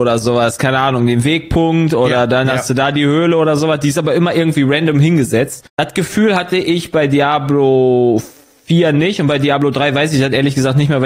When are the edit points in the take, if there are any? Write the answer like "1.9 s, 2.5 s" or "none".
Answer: 5.7 s